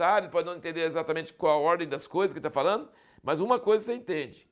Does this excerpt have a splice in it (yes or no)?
no